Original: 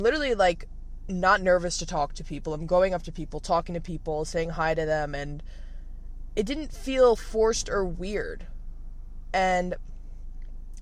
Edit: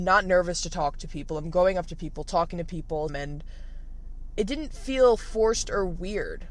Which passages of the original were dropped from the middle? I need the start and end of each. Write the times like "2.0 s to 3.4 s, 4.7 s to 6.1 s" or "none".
4.2 s to 5.1 s